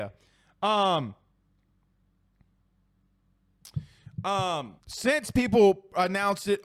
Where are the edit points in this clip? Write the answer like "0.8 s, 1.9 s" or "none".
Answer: 4.8 s